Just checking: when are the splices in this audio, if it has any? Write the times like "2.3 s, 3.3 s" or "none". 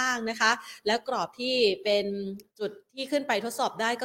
2.5 s